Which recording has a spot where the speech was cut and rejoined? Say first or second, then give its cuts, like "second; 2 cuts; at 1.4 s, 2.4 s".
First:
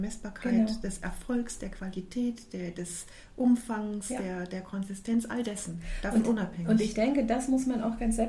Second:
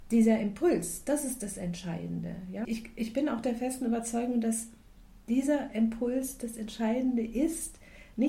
second; 1 cut; at 2.6 s